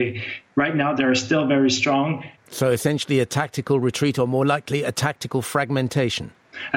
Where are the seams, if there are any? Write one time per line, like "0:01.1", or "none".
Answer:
none

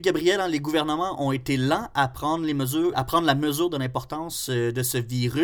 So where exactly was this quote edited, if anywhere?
0:02.9

